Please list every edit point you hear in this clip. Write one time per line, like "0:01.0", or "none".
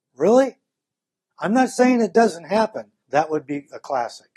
0:01.3
0:03.0